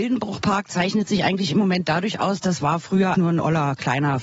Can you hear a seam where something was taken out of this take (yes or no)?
yes